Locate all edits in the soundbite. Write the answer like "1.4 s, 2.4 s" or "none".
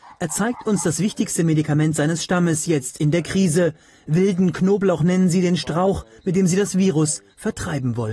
none

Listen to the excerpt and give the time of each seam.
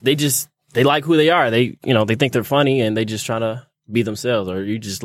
none

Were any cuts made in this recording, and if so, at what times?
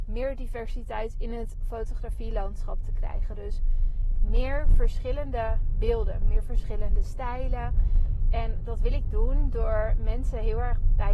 6.2 s

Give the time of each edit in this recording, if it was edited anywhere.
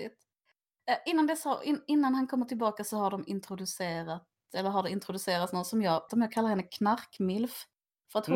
6.1 s

